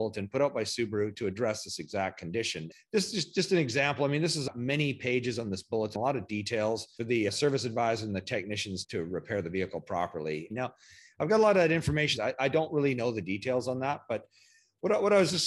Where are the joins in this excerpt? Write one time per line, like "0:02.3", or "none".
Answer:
0:07.0
0:10.5
0:12.2